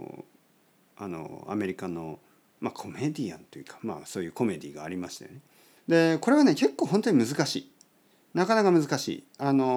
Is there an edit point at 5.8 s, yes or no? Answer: yes